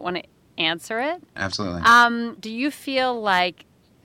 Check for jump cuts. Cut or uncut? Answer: cut